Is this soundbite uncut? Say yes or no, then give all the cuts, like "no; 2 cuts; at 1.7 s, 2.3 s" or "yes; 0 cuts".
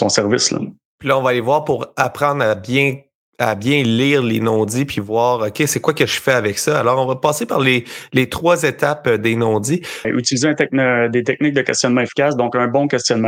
no; 1 cut; at 10.0 s